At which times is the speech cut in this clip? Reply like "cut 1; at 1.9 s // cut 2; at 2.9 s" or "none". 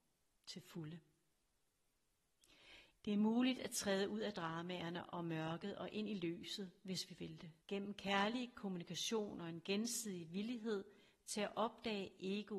cut 1; at 2.9 s // cut 2; at 7.6 s